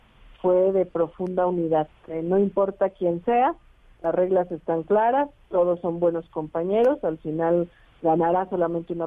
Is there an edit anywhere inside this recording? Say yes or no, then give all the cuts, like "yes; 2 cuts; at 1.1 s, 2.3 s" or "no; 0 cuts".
no; 0 cuts